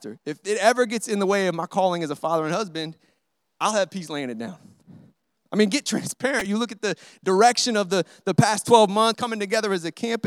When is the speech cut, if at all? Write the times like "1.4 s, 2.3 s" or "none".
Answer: 9.1 s

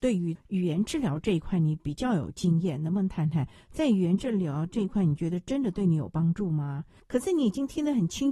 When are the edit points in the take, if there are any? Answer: none

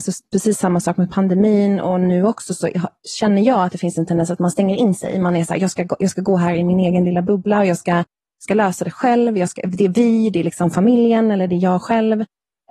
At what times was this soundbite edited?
none

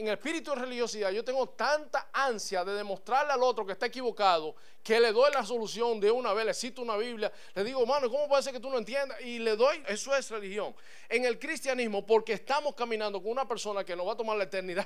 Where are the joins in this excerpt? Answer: 9.8 s

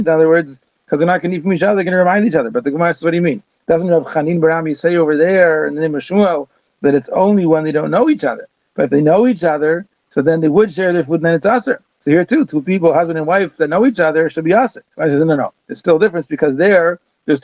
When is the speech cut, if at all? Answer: none

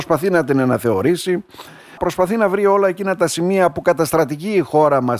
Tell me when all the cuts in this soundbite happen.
2.0 s

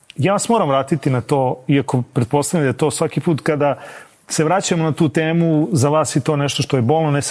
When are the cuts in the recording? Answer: none

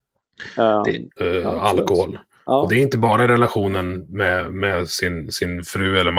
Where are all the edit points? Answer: 1.2 s

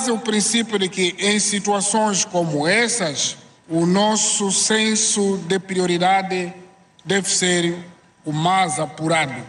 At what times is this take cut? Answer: none

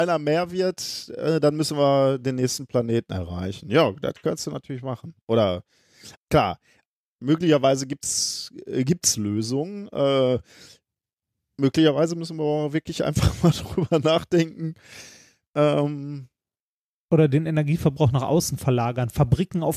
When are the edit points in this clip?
6.2 s

